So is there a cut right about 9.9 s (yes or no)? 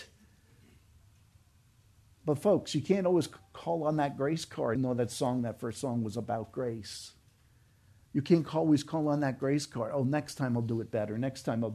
no